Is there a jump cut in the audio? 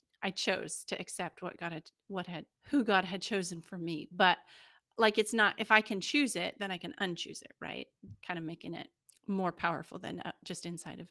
yes; 2 cuts; at 2.5 s, 8.1 s

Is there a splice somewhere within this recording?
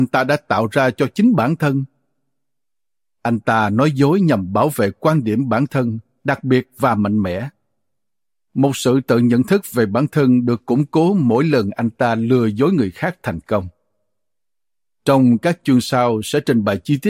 no; 0 cuts

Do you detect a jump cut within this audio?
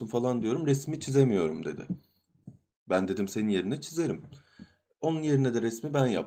no; 0 cuts

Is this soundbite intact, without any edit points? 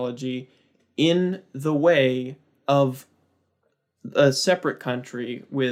yes; 0 cuts

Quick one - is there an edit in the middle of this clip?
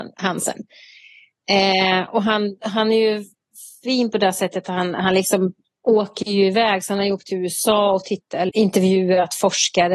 yes; 1 cut; at 8.5 s

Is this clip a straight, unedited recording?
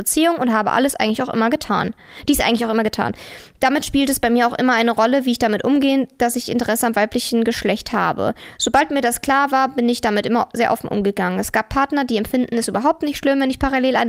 yes; 0 cuts

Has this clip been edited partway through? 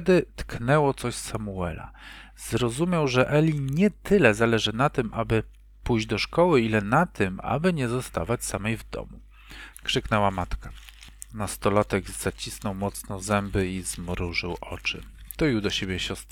yes; 1 cut; at 9.7 s

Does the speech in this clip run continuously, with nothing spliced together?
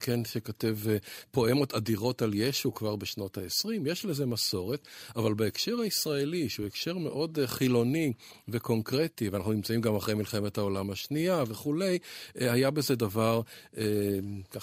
yes; 0 cuts

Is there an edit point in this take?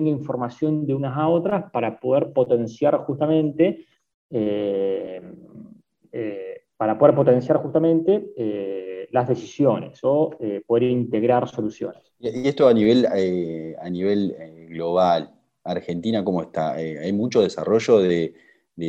no; 0 cuts

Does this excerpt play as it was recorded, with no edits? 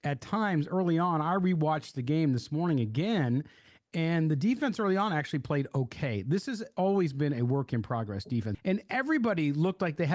no; 1 cut; at 8.5 s

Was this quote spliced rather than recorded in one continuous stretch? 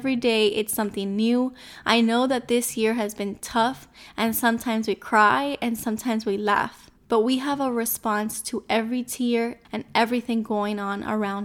yes; 2 cuts; at 7.0 s, 9.6 s

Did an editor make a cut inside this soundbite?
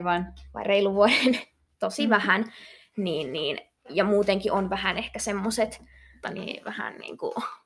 yes; 1 cut; at 6.2 s

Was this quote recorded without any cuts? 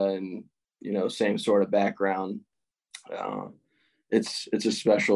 yes; 0 cuts

